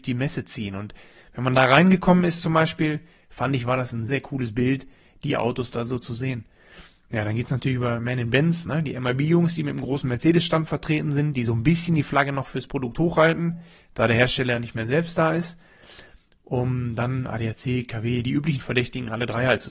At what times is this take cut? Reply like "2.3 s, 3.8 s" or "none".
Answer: 4.1 s